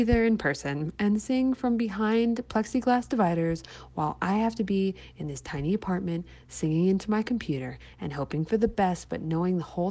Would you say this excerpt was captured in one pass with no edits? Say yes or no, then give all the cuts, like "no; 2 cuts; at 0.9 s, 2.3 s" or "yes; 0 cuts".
yes; 0 cuts